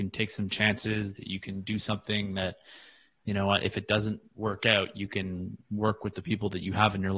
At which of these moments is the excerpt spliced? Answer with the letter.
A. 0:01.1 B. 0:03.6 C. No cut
C